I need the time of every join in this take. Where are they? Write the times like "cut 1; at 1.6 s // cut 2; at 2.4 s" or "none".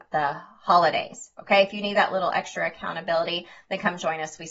none